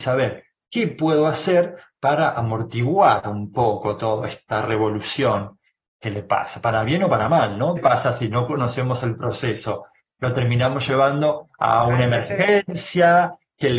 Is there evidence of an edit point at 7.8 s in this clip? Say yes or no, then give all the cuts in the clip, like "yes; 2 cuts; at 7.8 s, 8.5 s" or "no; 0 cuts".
yes; 1 cut; at 7.8 s